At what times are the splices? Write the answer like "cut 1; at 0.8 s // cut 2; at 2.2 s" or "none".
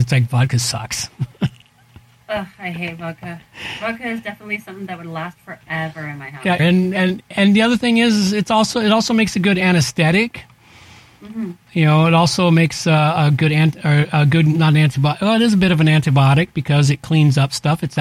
cut 1; at 6.6 s